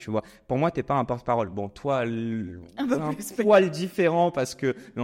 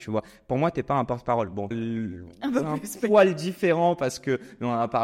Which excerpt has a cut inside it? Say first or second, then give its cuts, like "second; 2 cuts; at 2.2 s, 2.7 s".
second; 1 cut; at 1.7 s